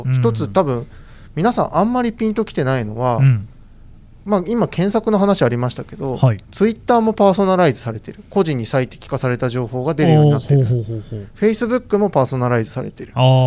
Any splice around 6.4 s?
yes; 1 cut; at 6.4 s

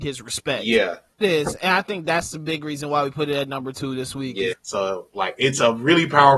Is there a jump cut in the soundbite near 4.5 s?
yes; 2 cuts; at 1.2 s, 4.5 s

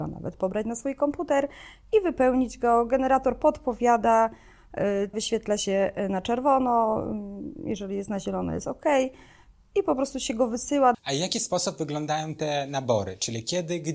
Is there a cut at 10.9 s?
yes; 2 cuts; at 5.1 s, 10.9 s

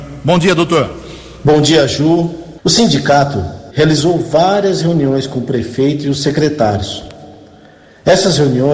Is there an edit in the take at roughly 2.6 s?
yes; 2 cuts; at 2.6 s, 3.7 s

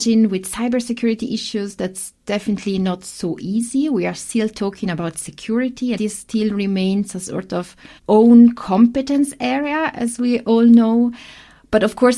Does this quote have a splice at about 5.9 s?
yes; 2 cuts; at 5.9 s, 8.0 s

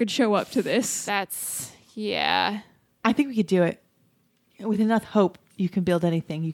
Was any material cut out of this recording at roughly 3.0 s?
yes; 1 cut; at 3.0 s

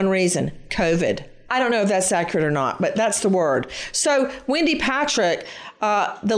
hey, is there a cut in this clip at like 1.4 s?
yes; 1 cut; at 1.4 s

